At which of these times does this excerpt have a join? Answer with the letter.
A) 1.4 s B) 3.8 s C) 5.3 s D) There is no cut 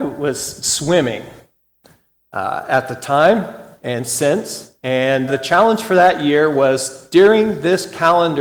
C